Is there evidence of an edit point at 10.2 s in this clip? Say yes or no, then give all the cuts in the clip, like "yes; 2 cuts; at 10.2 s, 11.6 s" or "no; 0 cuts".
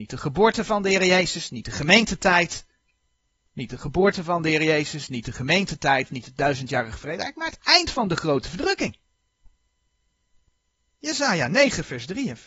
no; 0 cuts